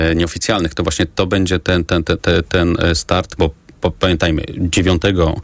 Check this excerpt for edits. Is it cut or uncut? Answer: cut